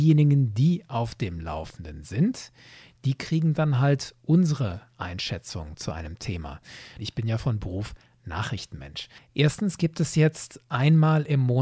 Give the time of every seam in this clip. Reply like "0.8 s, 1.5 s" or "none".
7.0 s, 9.2 s